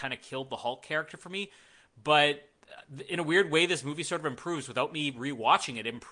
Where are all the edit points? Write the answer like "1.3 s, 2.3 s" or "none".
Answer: none